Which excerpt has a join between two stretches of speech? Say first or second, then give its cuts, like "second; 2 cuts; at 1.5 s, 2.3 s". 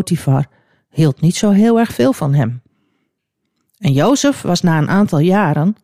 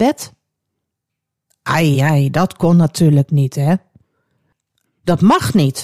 second; 2 cuts; at 1.9 s, 4.8 s